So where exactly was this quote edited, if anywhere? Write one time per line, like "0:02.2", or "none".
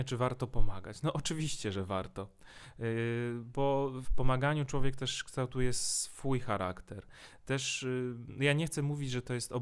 0:04.0